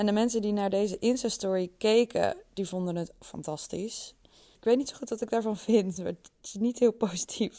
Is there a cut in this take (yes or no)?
yes